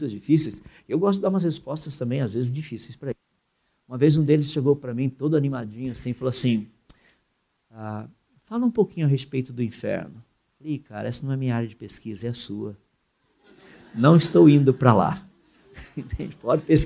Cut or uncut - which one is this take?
uncut